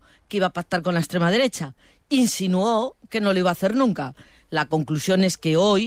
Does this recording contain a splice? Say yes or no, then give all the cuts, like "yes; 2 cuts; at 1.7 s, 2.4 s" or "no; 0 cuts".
no; 0 cuts